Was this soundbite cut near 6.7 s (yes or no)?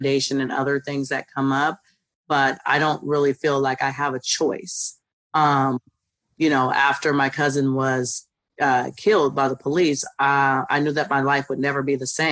no